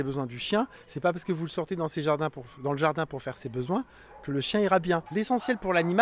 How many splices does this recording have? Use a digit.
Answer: 1